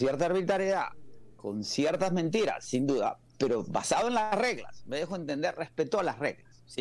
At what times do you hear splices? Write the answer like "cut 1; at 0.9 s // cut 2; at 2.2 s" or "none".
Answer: none